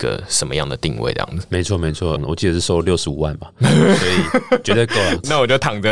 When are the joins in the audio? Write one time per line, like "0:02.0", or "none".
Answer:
0:02.2